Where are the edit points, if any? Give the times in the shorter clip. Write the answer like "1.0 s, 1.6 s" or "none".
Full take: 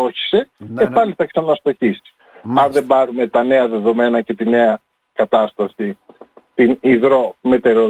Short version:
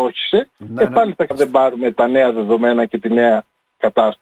1.3 s